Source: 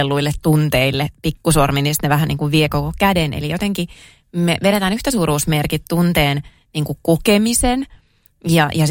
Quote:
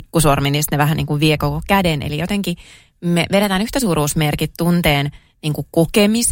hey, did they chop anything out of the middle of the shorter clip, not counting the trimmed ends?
no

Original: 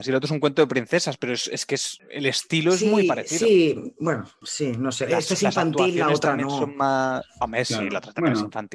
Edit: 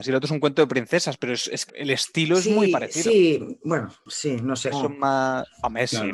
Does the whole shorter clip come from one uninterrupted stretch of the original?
no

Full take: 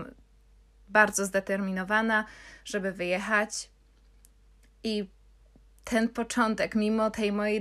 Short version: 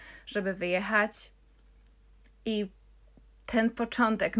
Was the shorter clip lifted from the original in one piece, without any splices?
yes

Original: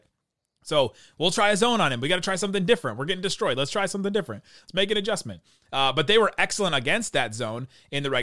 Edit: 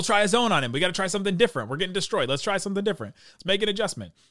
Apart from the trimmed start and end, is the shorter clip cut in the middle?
no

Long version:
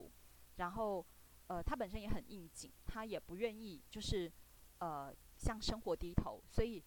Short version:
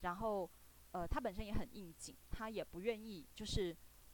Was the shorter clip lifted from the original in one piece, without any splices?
yes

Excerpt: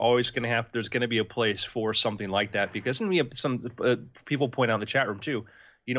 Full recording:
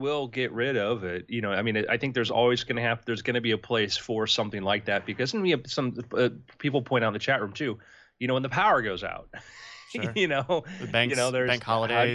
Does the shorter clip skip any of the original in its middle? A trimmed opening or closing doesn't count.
no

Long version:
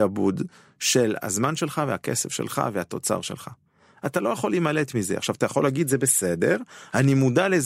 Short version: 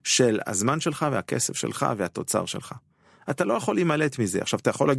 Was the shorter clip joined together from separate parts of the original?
no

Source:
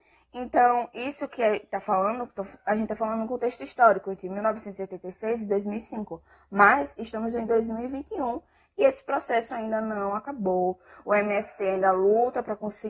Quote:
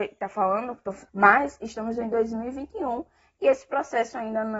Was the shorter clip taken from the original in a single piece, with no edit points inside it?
no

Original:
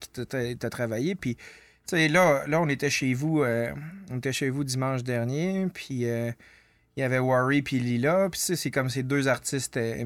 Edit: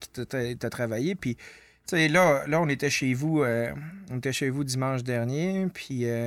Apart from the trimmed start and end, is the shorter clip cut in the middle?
no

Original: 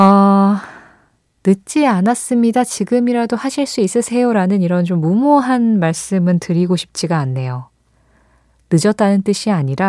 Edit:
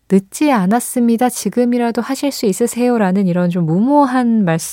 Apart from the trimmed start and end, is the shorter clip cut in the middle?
no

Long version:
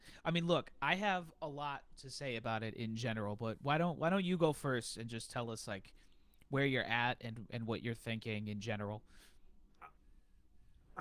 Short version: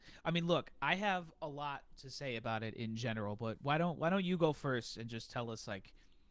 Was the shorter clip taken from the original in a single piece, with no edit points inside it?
yes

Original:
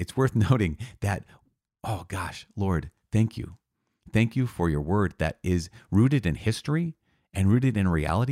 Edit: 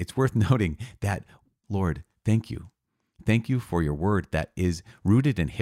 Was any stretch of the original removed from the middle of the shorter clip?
yes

